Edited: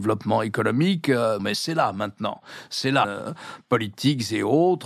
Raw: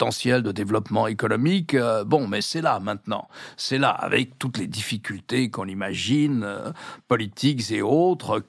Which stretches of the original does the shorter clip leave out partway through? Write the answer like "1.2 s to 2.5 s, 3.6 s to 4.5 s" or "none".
2.0 s to 2.3 s, 3.9 s to 6.4 s

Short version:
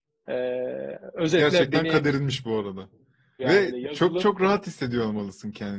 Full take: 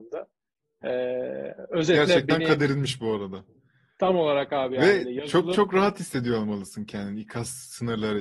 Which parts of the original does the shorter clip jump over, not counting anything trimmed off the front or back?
3.9 s to 4.7 s

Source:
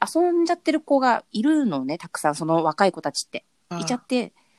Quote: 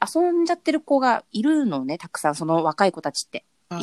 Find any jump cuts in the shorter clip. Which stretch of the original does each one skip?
none

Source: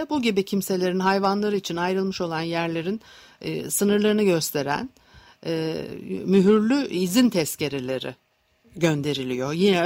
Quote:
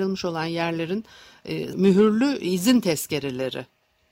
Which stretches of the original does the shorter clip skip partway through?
3.7 s to 6.2 s

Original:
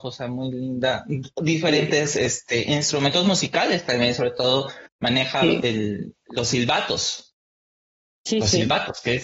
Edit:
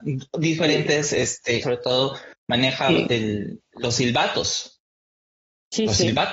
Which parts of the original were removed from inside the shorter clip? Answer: 2.7 s to 4.2 s

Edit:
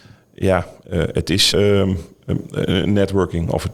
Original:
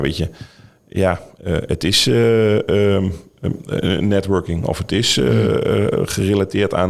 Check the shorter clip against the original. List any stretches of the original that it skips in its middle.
2.1 s to 2.7 s

